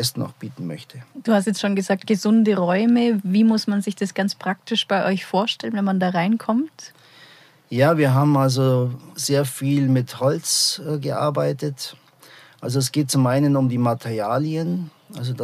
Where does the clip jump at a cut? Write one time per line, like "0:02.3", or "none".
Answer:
none